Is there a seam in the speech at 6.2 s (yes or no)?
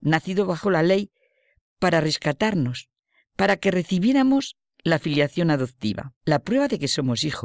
yes